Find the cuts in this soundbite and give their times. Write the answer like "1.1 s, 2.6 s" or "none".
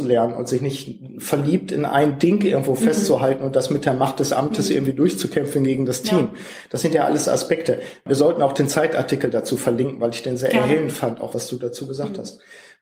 11.3 s